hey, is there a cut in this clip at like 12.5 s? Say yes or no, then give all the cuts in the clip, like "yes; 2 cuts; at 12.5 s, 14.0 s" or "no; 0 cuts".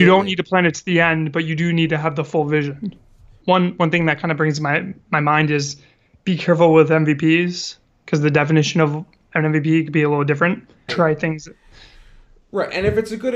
no; 2 cuts; at 3.4 s, 10.9 s